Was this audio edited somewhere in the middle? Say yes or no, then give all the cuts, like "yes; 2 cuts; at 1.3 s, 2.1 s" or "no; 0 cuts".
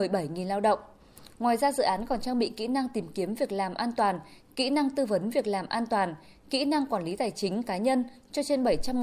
no; 0 cuts